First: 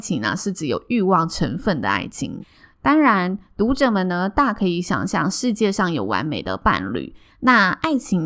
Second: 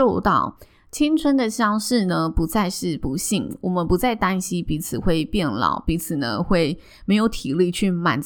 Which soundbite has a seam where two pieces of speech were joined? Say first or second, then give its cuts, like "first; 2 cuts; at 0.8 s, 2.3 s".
first; 2 cuts; at 2.4 s, 7.3 s